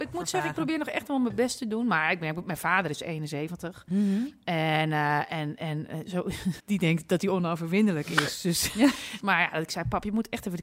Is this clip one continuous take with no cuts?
no; 2 cuts; at 6.6 s, 9.2 s

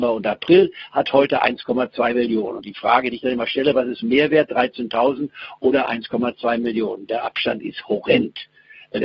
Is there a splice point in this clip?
no; 0 cuts

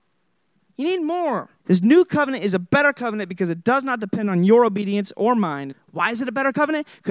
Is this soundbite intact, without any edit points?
no; 2 cuts; at 1.6 s, 5.7 s

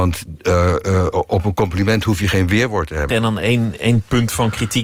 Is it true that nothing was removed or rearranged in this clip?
no; 1 cut; at 3.1 s

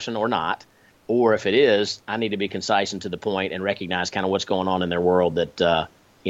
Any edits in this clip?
no; 0 cuts

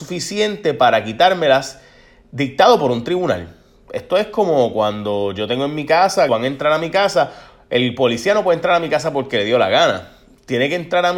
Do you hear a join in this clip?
yes; 1 cut; at 6.3 s

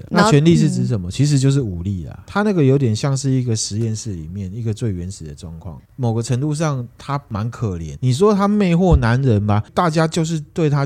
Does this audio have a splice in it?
yes; 2 cuts; at 5.8 s, 9.7 s

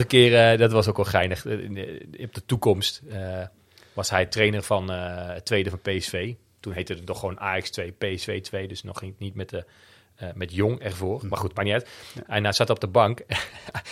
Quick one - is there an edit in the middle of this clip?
no; 0 cuts

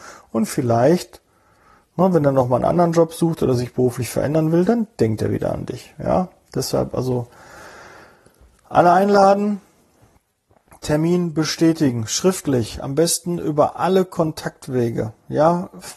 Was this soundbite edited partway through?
no; 0 cuts

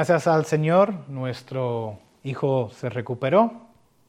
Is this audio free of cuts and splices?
yes; 0 cuts

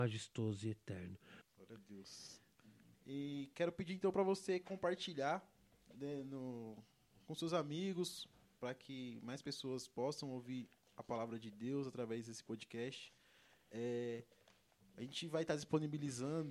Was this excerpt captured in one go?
no; 2 cuts; at 1.4 s, 2.9 s

